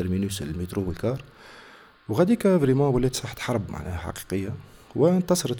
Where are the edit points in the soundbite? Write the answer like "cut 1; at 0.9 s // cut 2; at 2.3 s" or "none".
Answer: none